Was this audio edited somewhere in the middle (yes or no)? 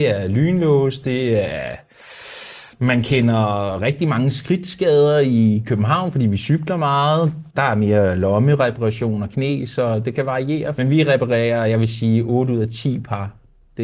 yes